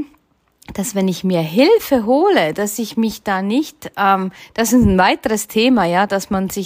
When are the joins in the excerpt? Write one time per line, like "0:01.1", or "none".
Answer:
none